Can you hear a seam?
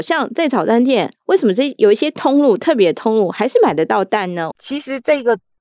yes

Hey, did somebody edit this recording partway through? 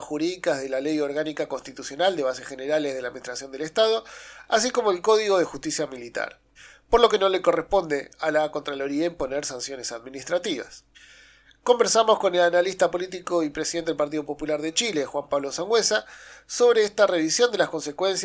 no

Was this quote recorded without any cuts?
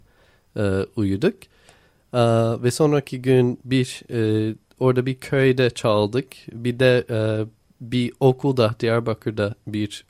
yes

